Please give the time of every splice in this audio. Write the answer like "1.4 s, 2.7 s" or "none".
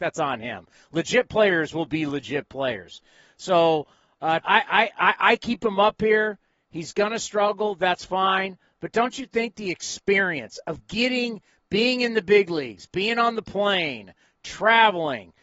4.4 s